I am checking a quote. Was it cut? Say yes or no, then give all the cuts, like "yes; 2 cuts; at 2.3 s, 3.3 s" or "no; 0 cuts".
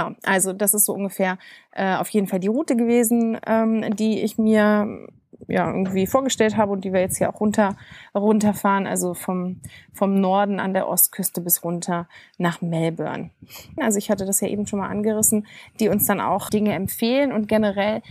yes; 2 cuts; at 13.8 s, 16.5 s